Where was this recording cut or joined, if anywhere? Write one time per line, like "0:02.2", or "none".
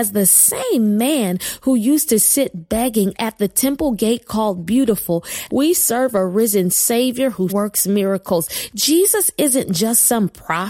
0:05.5
0:07.5